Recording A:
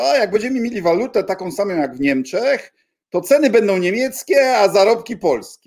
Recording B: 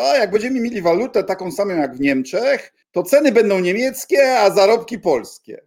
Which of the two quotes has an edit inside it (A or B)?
B